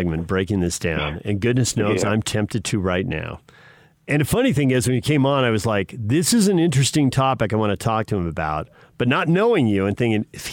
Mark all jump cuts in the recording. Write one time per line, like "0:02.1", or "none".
none